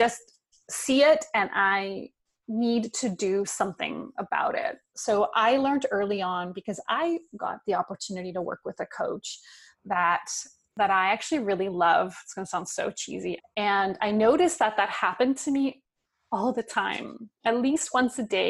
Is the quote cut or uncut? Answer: cut